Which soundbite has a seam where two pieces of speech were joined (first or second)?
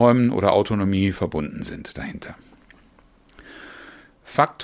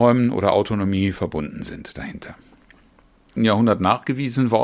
second